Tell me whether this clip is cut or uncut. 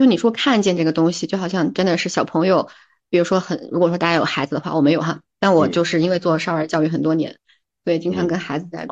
cut